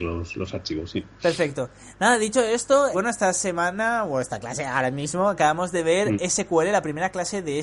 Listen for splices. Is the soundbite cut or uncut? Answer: cut